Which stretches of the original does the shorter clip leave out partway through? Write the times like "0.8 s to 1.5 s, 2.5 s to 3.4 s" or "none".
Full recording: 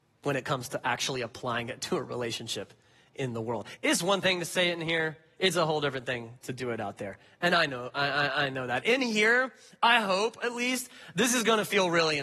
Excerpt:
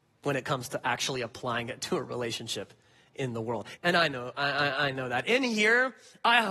3.8 s to 7.4 s